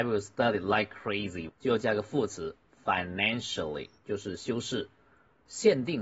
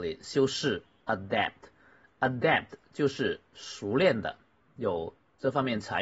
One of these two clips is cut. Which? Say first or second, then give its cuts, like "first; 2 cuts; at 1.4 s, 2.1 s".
first; 2 cuts; at 1.5 s, 4.0 s